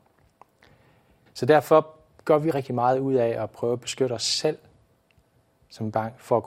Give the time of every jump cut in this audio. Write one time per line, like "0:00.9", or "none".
0:01.3
0:02.5